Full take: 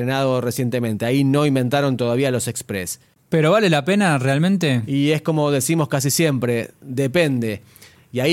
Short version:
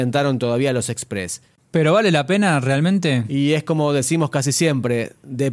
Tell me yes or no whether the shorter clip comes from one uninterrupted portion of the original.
yes